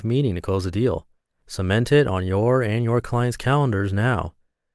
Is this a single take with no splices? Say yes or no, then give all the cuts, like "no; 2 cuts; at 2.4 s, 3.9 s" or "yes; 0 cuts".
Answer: yes; 0 cuts